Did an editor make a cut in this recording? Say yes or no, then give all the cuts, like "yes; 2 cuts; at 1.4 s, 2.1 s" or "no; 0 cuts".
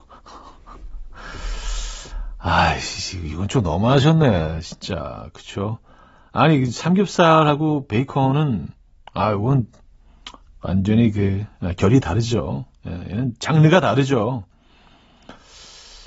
no; 0 cuts